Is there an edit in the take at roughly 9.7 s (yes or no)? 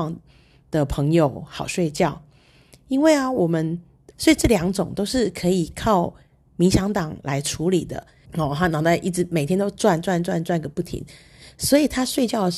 no